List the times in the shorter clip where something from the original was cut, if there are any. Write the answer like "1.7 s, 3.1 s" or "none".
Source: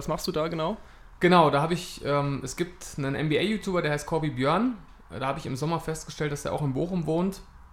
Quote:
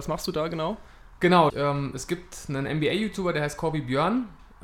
1.5 s